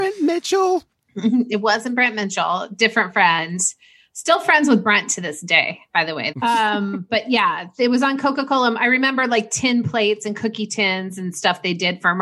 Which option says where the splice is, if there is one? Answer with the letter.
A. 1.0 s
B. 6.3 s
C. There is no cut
B